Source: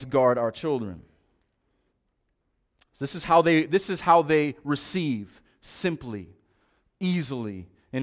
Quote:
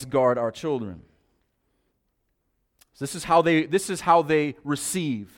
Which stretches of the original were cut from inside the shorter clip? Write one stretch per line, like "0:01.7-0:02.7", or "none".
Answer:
none